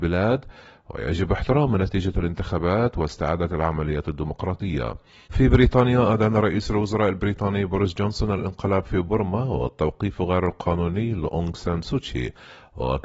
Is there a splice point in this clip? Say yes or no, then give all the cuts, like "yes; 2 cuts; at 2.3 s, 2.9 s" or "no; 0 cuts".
yes; 1 cut; at 5.3 s